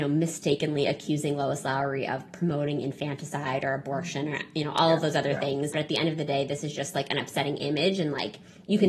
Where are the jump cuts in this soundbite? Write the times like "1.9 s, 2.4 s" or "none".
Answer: 5.7 s